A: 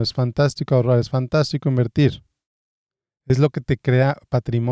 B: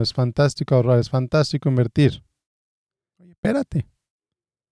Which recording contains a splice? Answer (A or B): B